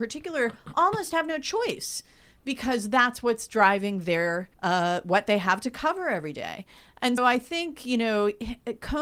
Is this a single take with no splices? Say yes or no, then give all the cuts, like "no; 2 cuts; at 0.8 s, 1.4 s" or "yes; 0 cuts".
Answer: no; 2 cuts; at 4.5 s, 7.2 s